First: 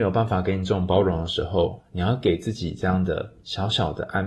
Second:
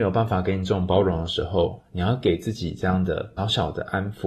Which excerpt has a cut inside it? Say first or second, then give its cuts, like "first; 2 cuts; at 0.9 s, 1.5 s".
second; 1 cut; at 3.4 s